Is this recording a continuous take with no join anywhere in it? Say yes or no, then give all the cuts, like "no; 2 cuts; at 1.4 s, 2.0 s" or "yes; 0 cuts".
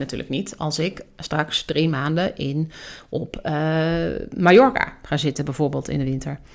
yes; 0 cuts